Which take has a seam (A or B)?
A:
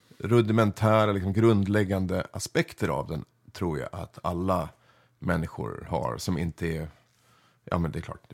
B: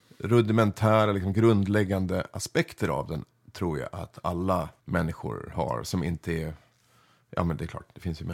B